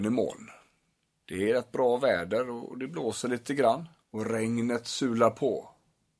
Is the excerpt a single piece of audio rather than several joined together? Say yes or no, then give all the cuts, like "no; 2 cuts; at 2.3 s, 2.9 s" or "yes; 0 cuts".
no; 2 cuts; at 1.2 s, 4.0 s